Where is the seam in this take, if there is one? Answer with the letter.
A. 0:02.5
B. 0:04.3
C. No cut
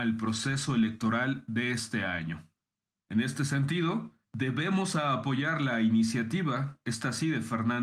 C